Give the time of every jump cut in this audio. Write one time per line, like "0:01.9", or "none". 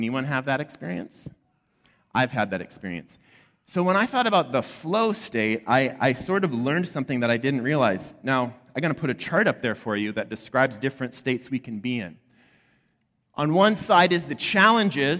none